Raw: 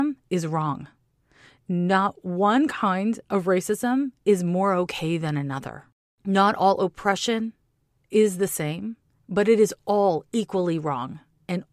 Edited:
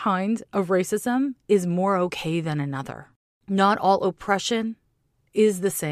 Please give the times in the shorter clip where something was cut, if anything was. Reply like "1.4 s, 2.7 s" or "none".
none